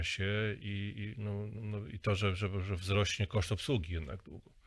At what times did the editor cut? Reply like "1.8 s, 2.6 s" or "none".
none